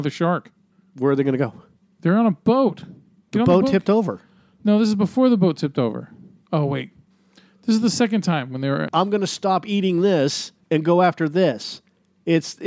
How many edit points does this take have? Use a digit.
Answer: 2